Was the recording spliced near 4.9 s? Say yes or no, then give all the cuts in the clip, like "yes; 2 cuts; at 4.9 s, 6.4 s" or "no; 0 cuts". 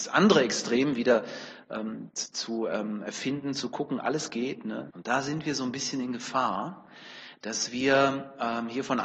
yes; 1 cut; at 4.9 s